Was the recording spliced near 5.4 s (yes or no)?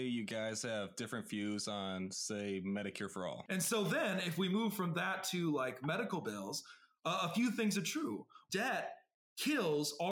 no